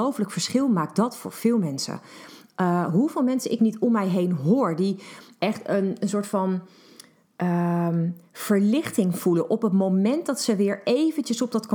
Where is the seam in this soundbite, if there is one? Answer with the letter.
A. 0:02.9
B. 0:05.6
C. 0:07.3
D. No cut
D